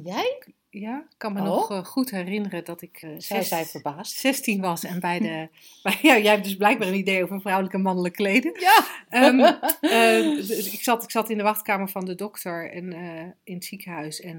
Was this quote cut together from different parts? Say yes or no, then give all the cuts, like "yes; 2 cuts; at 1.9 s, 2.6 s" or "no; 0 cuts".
yes; 1 cut; at 3.0 s